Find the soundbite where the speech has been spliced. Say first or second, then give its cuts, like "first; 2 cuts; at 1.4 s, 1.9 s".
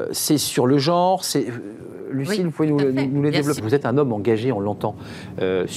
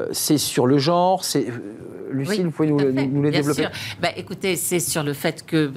first; 1 cut; at 3.6 s